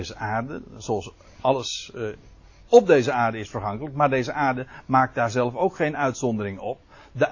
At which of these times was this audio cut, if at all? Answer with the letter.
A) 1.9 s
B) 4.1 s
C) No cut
C